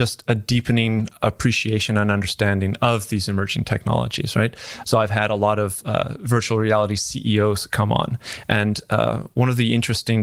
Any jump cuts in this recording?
yes; 1 cut; at 4.8 s

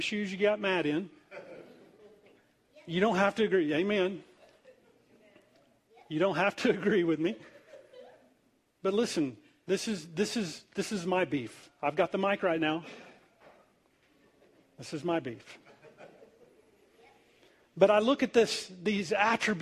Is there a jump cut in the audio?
no; 0 cuts

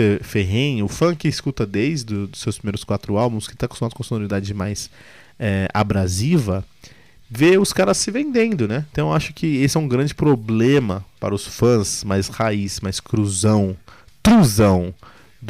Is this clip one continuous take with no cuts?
no; 1 cut; at 8.9 s

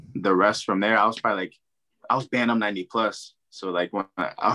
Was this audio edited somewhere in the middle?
no; 0 cuts

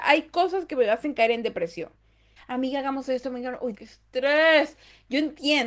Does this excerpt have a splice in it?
yes; 2 cuts; at 2.4 s, 3.7 s

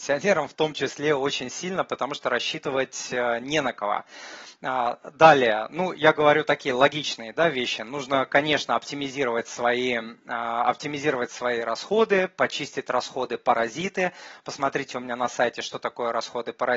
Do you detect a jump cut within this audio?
no; 0 cuts

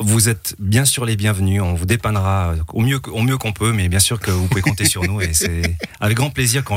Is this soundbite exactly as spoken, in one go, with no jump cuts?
yes; 0 cuts

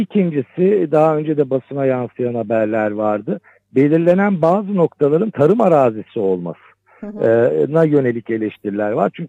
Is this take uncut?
no; 1 cut; at 5.3 s

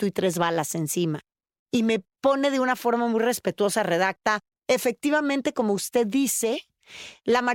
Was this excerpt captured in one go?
yes; 0 cuts

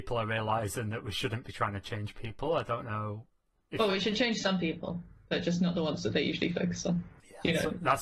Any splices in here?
no; 0 cuts

